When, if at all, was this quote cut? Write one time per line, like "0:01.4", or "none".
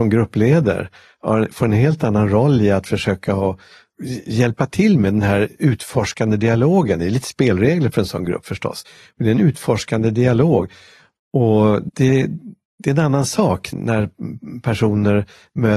0:11.9
0:13.7